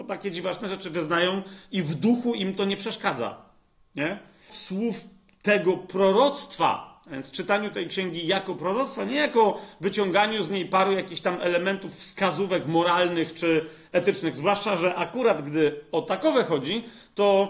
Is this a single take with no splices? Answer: no; 1 cut; at 4.5 s

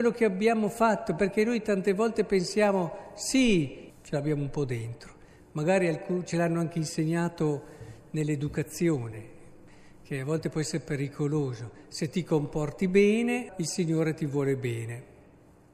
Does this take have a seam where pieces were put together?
yes; 2 cuts; at 3.9 s, 13.5 s

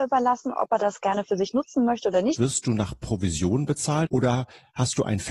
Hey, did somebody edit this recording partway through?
yes; 2 cuts; at 2.4 s, 4.1 s

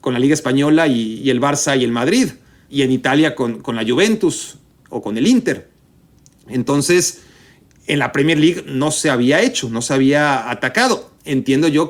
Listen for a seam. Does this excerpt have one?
no; 0 cuts

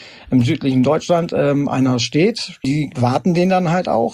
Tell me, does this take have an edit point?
yes; 1 cut; at 2.6 s

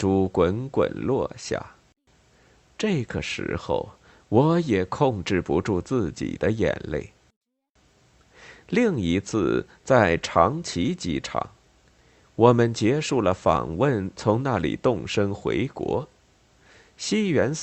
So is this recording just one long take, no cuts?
yes; 0 cuts

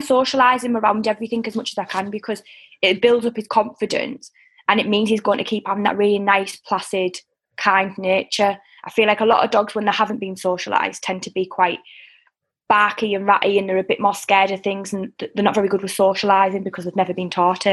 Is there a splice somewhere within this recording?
no; 0 cuts

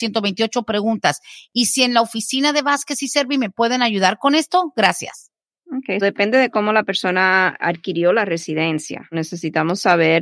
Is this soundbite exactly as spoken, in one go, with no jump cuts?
yes; 0 cuts

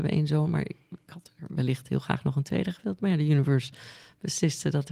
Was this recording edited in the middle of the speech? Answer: no; 0 cuts

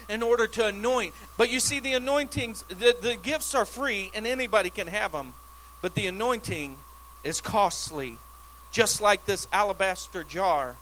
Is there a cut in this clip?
yes; 1 cut; at 1.3 s

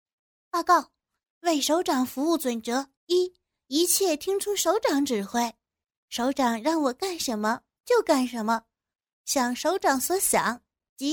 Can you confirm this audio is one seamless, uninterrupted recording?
no; 1 cut; at 3.0 s

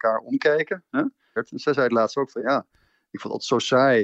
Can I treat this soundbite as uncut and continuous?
no; 1 cut; at 1.4 s

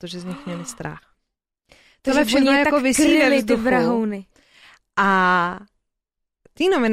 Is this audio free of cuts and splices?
yes; 0 cuts

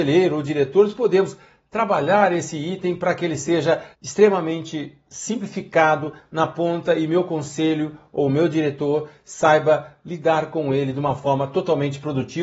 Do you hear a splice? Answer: yes; 1 cut; at 3.9 s

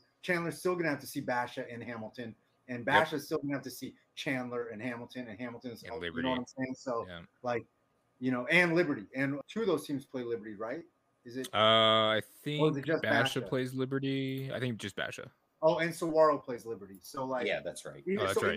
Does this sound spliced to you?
yes; 1 cut; at 9.4 s

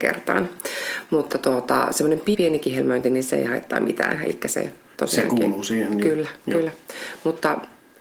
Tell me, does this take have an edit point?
yes; 1 cut; at 2.3 s

